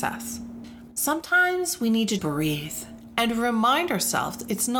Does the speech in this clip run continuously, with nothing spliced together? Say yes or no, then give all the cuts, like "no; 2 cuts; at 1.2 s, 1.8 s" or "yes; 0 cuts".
no; 2 cuts; at 0.9 s, 2.2 s